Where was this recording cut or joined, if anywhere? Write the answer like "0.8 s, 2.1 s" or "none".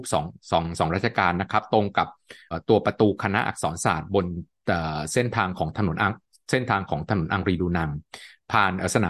2.5 s